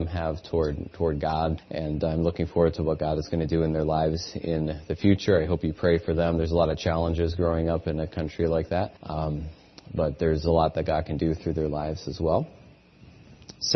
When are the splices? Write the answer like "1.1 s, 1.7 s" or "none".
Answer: 1.6 s, 9.0 s